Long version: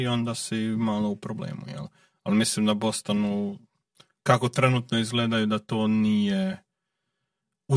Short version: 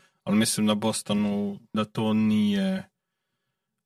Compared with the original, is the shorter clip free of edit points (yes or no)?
no